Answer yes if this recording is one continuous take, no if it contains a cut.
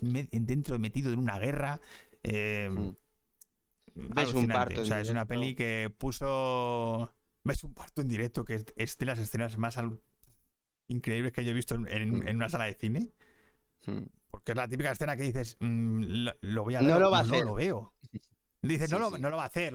yes